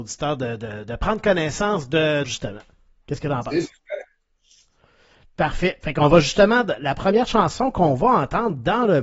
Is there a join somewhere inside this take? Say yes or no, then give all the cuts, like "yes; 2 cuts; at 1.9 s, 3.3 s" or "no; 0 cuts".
yes; 1 cut; at 2.2 s